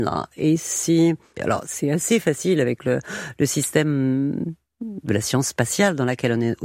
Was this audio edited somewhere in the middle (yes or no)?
yes